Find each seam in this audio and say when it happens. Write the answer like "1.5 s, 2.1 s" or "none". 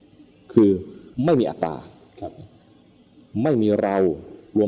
1.1 s